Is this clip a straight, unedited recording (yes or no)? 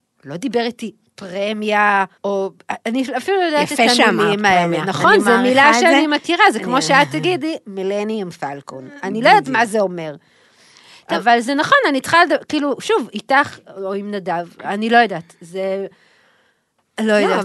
no